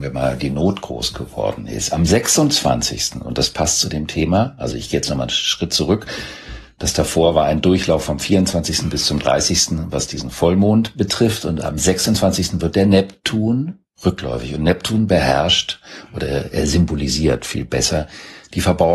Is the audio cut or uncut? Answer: uncut